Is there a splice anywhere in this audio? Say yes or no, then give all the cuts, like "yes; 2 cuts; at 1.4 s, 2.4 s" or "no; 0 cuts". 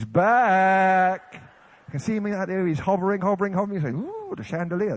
no; 0 cuts